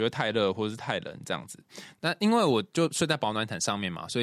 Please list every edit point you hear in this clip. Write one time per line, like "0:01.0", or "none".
none